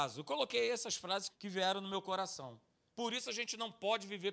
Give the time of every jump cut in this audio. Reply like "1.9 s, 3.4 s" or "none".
1.3 s